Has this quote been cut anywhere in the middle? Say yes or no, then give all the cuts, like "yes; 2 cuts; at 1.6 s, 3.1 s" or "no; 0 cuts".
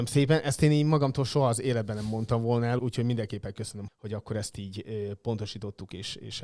yes; 2 cuts; at 2.8 s, 3.9 s